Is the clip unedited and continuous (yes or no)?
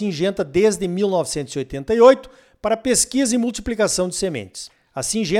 yes